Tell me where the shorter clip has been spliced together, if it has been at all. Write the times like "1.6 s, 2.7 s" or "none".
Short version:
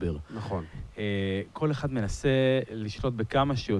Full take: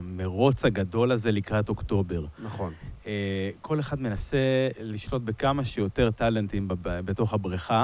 none